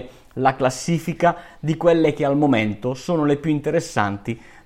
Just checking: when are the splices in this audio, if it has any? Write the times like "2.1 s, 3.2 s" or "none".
none